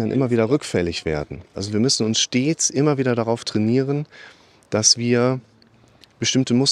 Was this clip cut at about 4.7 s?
no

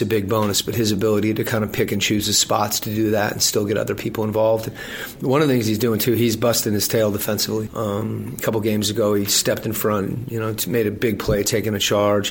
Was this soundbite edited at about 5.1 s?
no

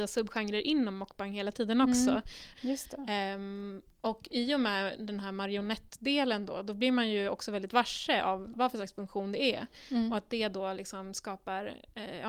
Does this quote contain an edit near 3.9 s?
no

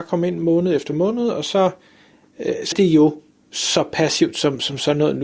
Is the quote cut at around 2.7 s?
yes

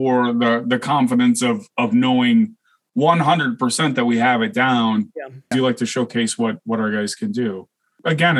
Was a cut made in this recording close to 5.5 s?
yes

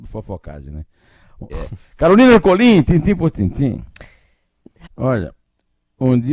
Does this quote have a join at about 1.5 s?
yes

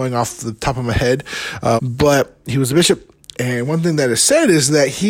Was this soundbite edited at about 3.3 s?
no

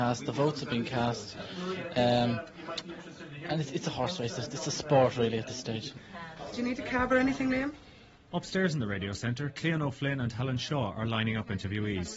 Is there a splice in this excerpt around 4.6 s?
no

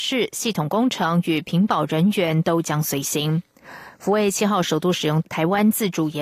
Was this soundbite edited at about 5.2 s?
yes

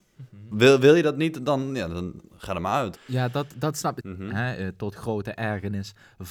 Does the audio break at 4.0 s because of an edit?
yes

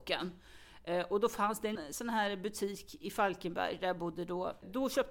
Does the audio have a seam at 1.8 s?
yes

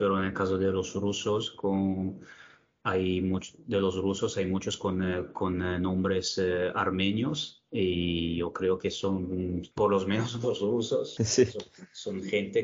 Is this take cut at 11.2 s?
yes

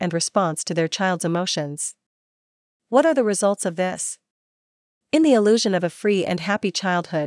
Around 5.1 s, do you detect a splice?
no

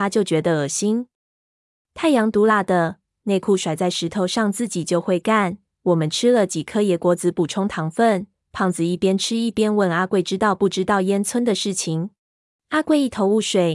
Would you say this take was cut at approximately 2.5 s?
yes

